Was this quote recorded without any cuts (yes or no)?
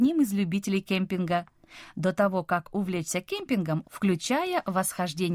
no